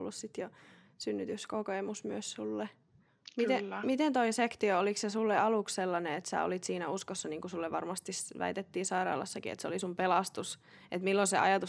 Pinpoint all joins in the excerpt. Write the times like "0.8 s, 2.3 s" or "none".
3.1 s